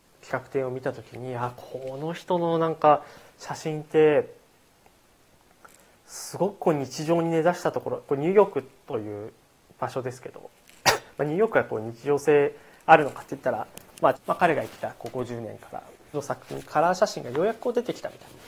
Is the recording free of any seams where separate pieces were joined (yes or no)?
no